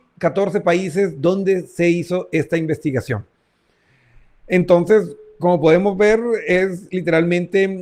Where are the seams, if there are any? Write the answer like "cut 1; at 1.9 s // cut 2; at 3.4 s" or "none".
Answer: none